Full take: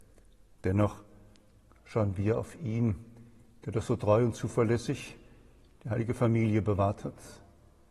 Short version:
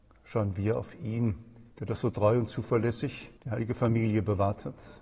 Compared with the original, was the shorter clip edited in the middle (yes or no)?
yes